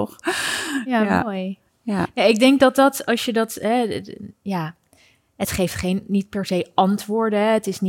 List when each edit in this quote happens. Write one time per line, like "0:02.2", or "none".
none

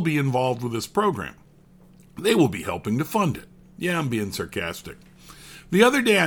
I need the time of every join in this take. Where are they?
none

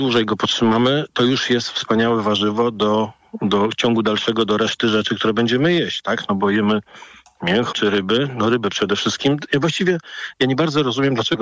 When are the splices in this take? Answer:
0:07.7

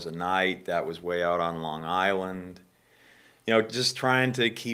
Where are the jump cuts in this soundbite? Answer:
none

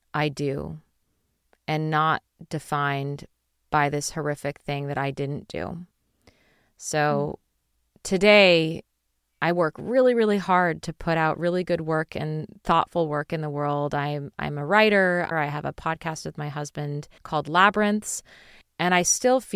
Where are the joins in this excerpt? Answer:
0:15.3
0:17.2

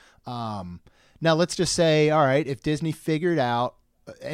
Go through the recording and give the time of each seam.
none

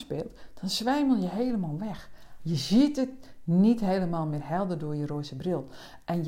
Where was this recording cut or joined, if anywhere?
0:02.4

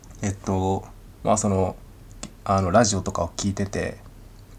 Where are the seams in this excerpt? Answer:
0:01.1

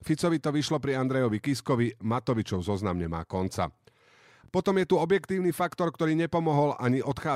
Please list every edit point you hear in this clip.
none

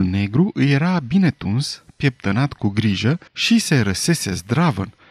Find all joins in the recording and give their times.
0:03.3

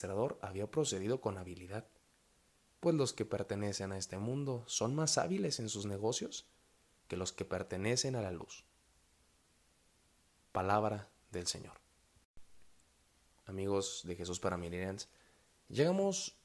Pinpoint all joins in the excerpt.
0:13.4

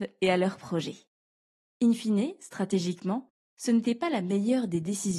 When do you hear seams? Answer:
none

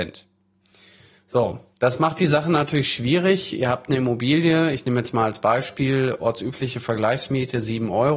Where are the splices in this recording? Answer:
0:01.2

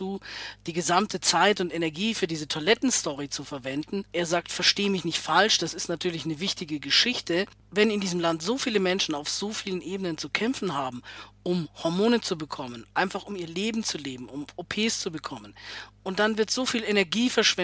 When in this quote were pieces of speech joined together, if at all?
none

